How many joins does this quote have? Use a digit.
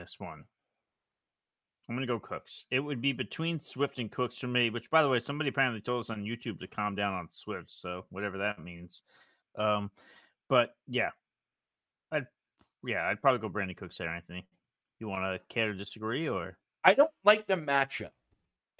1